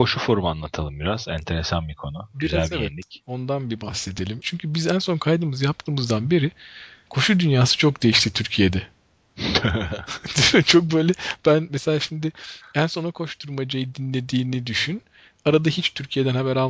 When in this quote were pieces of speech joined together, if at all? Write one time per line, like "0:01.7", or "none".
0:04.4